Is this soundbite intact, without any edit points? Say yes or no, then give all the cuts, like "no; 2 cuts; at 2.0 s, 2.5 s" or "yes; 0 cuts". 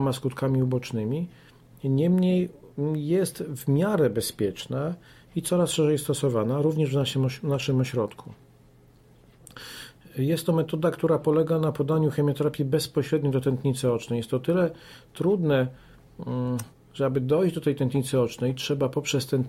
yes; 0 cuts